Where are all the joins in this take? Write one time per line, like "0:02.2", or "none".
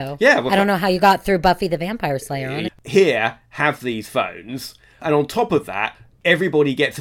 0:02.7